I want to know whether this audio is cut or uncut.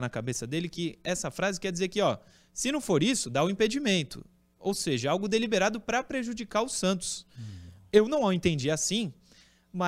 uncut